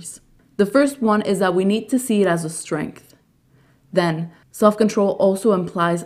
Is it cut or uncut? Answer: uncut